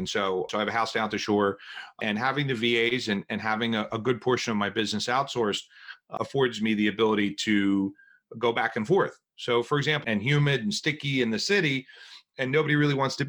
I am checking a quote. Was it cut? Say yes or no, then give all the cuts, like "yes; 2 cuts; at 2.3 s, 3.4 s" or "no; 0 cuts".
yes; 1 cut; at 10.0 s